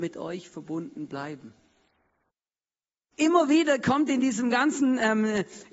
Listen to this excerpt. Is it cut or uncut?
uncut